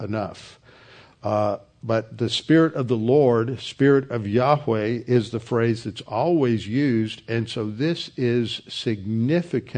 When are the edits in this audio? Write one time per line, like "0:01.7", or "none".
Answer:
none